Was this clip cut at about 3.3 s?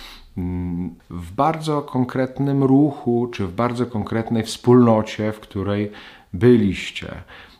no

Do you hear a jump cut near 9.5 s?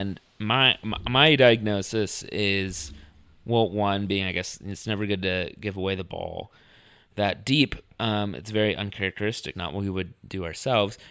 yes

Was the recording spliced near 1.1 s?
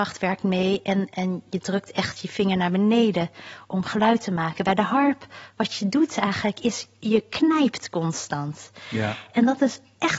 yes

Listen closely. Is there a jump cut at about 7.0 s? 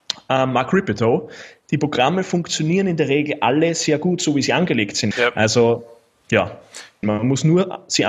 yes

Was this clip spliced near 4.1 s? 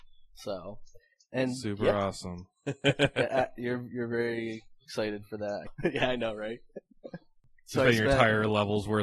no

